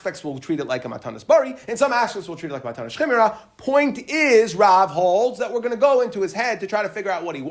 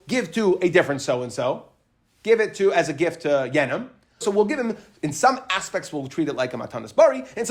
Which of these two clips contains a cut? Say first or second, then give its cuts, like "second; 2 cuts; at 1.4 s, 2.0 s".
second; 1 cut; at 4.2 s